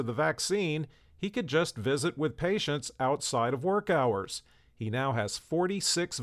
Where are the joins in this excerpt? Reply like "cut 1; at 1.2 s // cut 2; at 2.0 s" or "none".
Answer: none